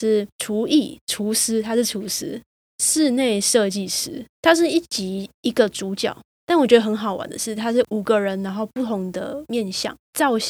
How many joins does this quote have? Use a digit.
3